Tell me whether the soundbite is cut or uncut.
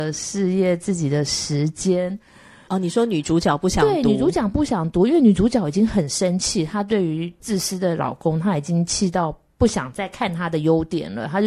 cut